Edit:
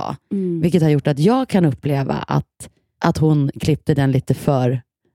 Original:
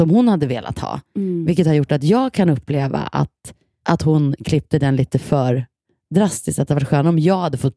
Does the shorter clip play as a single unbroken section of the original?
yes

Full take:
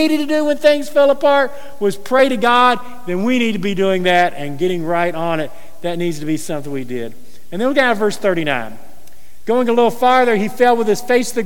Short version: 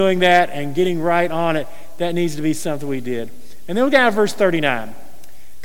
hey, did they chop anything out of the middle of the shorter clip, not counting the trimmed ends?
no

